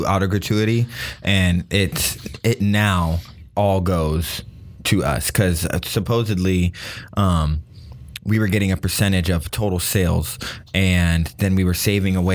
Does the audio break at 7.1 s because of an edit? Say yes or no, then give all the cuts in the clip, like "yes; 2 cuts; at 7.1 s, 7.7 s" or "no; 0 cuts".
no; 0 cuts